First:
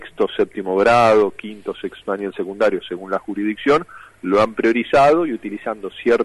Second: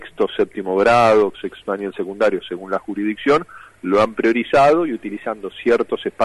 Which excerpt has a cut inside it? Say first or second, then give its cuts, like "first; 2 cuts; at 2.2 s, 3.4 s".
second; 1 cut; at 1.3 s